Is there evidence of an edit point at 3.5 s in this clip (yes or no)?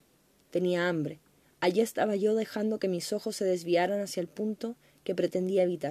no